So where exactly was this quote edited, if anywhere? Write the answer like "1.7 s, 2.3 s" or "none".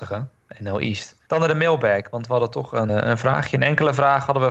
1.2 s, 2.9 s